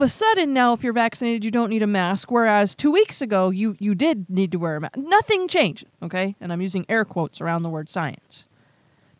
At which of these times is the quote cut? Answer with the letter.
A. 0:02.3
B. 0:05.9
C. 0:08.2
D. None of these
B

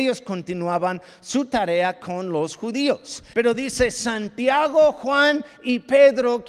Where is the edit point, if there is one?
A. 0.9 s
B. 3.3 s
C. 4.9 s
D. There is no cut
B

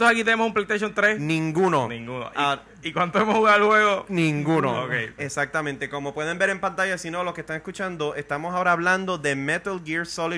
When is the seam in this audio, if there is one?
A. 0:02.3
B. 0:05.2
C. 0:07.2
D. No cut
B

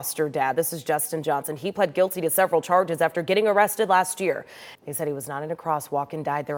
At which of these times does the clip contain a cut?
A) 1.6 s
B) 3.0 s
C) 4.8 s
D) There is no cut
C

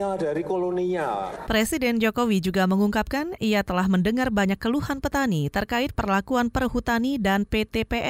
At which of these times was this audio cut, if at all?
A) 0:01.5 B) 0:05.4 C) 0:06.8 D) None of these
A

